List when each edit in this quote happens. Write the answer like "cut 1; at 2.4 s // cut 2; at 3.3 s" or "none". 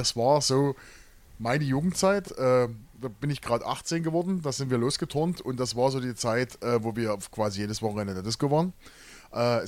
cut 1; at 2.2 s